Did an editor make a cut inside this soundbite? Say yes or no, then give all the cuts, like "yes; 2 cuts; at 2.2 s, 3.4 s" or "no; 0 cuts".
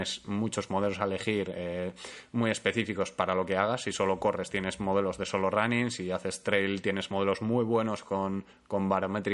no; 0 cuts